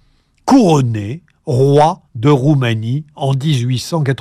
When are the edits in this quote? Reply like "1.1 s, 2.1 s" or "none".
2.1 s